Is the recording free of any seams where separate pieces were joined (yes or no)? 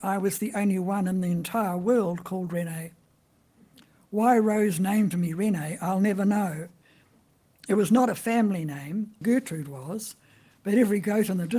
no